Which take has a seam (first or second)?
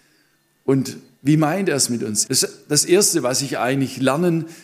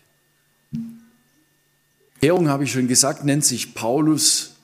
first